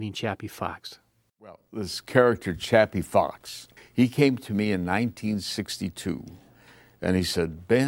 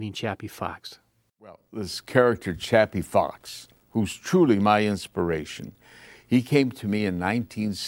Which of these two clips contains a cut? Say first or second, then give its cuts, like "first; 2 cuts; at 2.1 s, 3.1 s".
first; 1 cut; at 3.8 s